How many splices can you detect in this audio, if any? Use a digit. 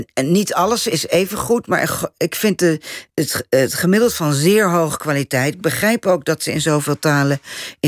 0